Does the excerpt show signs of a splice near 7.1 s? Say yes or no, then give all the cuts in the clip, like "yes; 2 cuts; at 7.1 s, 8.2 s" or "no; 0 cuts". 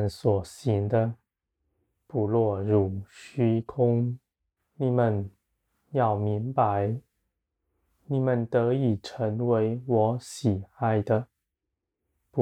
no; 1 cut; at 4.6 s